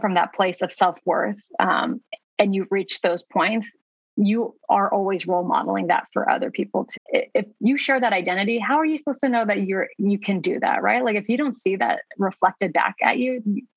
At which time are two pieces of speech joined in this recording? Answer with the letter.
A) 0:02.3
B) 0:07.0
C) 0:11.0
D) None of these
B